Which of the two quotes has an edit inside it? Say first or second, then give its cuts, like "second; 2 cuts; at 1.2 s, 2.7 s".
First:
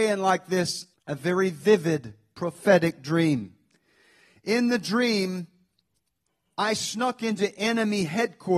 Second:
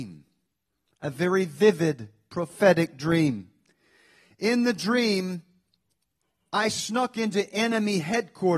first; 1 cut; at 0.9 s